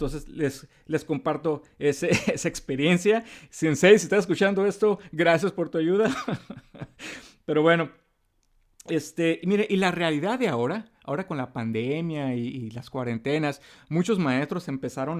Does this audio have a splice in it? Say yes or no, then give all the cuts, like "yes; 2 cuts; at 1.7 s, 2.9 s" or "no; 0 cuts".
no; 0 cuts